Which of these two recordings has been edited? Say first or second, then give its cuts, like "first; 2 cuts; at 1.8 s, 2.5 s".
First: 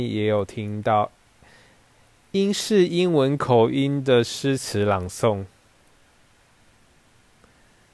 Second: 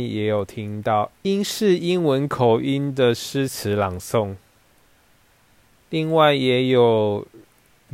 second; 2 cuts; at 1.1 s, 5.8 s